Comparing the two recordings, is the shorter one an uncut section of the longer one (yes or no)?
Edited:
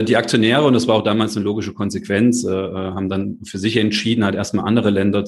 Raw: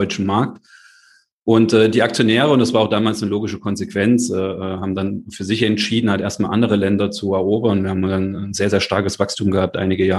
yes